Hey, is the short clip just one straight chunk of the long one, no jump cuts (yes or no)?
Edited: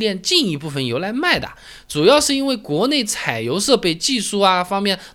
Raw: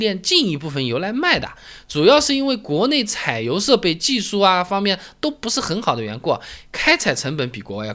yes